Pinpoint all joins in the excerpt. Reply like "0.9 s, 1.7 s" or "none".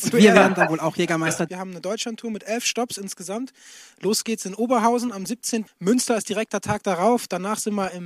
1.5 s, 5.7 s